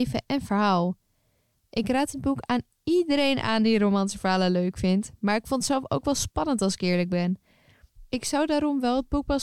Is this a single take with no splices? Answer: yes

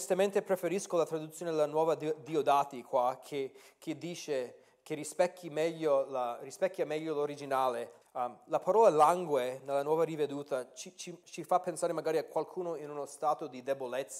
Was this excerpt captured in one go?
no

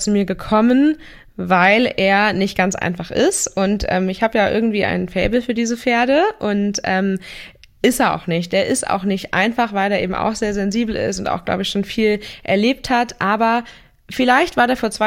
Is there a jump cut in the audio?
no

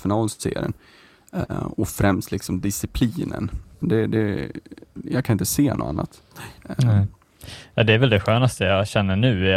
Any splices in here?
yes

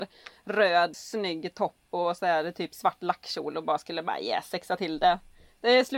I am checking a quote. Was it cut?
yes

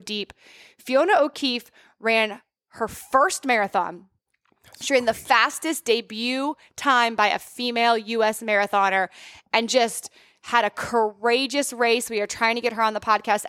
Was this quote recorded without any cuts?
yes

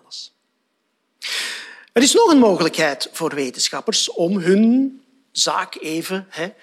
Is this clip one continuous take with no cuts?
yes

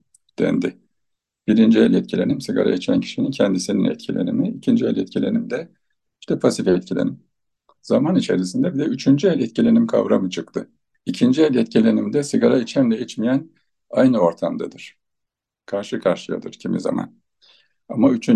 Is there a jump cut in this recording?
no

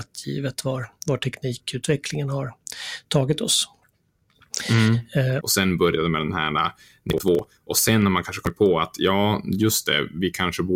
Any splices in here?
yes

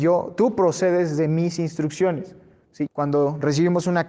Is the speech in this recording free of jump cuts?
no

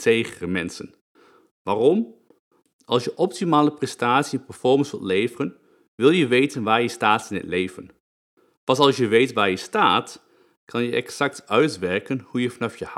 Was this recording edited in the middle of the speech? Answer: no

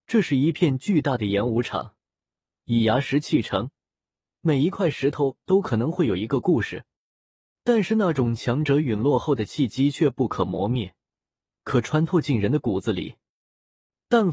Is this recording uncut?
no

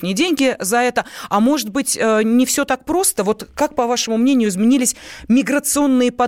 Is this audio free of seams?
yes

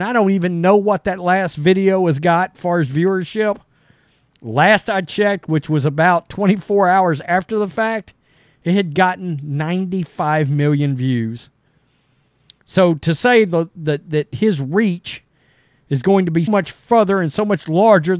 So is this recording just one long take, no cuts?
no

